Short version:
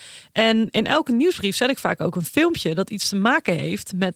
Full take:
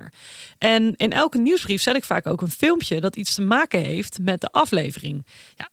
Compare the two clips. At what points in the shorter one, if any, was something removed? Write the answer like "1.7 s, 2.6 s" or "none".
none